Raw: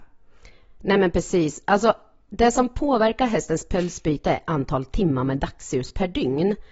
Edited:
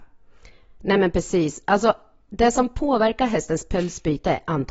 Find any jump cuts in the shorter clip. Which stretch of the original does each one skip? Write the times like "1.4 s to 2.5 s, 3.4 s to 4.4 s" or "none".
none

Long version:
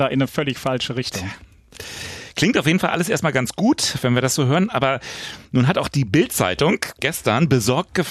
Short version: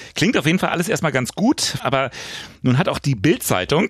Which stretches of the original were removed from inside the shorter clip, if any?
4.0 s to 4.7 s

